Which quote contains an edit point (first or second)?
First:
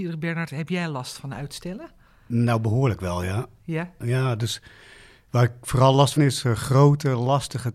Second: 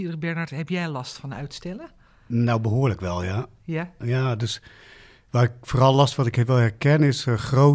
first